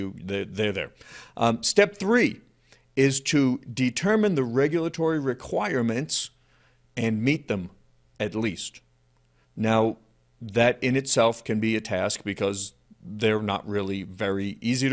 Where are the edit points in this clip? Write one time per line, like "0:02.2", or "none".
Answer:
0:09.4